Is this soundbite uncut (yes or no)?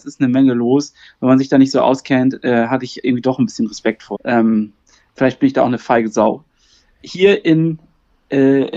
no